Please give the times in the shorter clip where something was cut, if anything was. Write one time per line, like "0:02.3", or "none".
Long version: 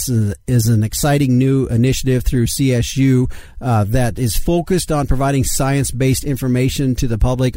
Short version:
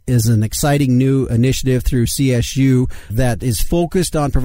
0:03.1